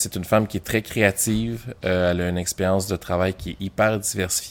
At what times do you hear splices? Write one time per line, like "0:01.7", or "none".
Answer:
none